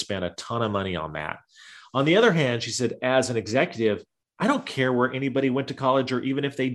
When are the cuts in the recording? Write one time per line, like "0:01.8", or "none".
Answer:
none